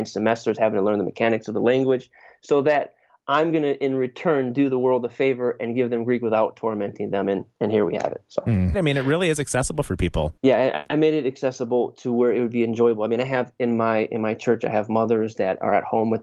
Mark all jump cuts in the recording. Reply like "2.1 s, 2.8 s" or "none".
8.7 s, 10.4 s